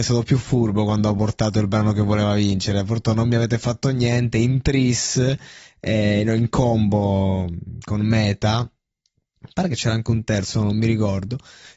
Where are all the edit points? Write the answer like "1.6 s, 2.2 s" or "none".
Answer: none